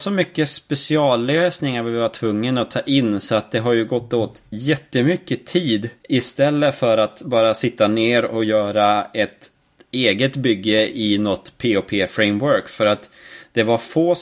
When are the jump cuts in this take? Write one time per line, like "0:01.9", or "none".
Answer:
0:06.0